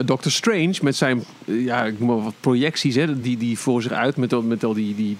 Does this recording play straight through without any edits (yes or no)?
yes